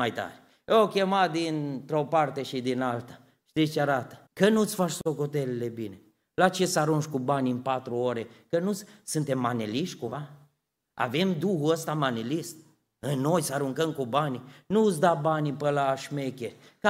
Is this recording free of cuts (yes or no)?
no